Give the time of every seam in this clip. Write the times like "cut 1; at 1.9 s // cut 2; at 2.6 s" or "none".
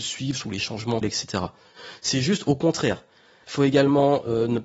cut 1; at 1.0 s // cut 2; at 3.4 s

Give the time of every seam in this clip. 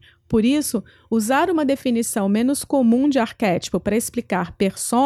none

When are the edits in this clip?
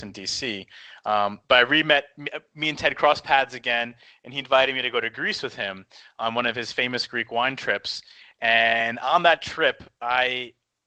none

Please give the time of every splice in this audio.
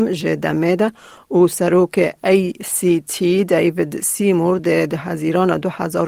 none

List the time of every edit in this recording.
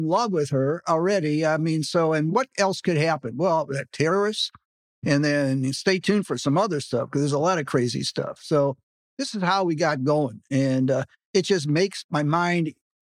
none

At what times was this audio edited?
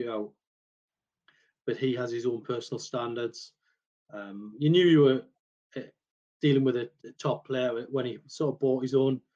none

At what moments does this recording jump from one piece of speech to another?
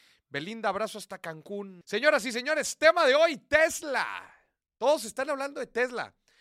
cut 1; at 1.8 s

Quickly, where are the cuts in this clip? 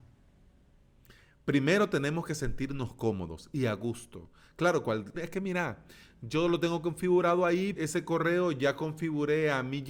cut 1; at 5.1 s // cut 2; at 7.8 s

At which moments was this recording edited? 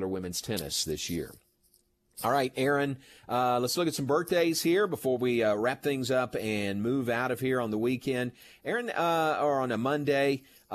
none

